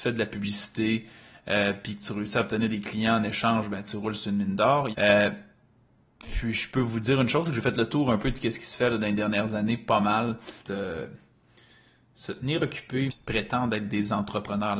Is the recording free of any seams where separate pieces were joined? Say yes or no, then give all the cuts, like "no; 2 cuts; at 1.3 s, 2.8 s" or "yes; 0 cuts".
no; 3 cuts; at 4.9 s, 10.6 s, 13.1 s